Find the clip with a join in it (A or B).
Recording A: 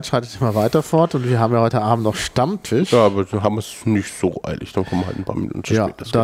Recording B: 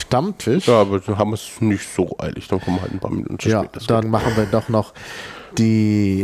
B